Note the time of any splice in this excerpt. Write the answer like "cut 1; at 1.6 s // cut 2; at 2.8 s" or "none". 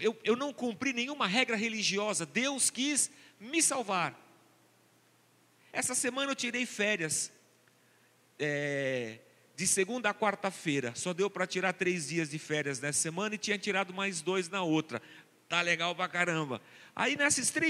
cut 1; at 5.7 s